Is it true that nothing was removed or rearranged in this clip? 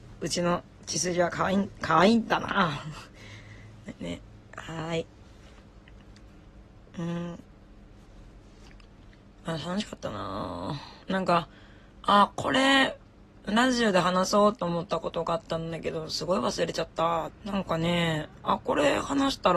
no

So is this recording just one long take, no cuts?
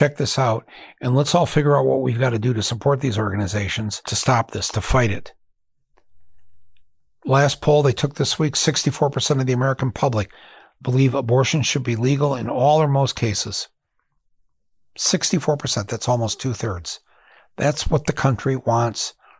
yes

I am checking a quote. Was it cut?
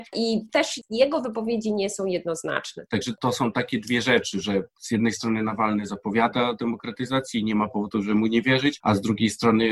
yes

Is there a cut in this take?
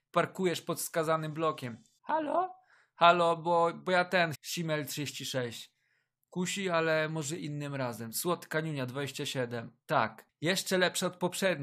yes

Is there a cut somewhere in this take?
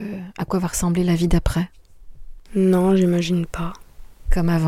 yes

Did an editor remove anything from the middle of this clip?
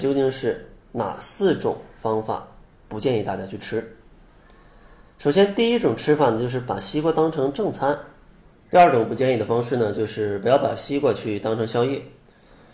yes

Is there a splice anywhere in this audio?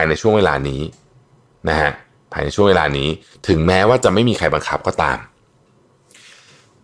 no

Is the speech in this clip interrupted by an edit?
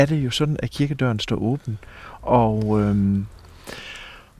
yes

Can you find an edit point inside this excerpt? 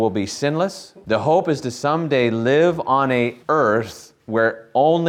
yes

